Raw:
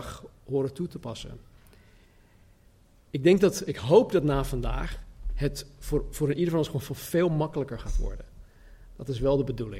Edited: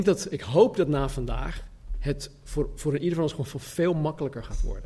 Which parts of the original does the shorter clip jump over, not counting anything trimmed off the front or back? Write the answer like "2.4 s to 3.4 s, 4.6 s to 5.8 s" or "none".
none